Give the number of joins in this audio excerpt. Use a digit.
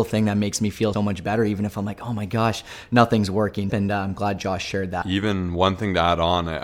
2